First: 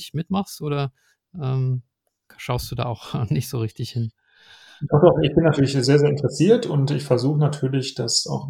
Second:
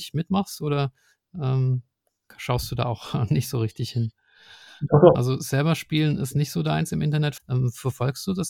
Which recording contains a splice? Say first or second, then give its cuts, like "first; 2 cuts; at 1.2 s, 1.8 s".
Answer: second; 2 cuts; at 5.1 s, 7.4 s